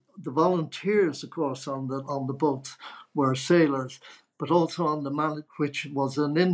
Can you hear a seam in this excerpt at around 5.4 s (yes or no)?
yes